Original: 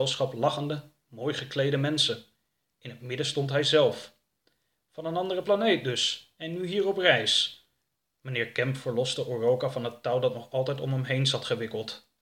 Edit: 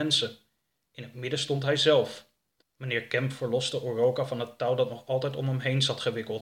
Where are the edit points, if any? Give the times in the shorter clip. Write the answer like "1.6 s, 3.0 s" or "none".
2.6 s